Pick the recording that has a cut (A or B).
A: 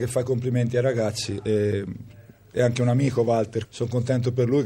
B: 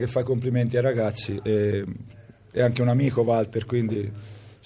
A